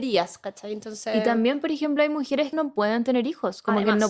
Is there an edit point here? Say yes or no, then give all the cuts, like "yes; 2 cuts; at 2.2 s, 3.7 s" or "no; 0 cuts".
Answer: yes; 1 cut; at 2.5 s